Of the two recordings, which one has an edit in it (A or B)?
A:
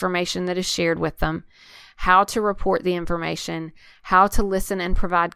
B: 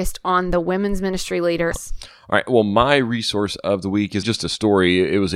B